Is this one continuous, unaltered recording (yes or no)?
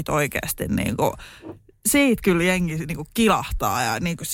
yes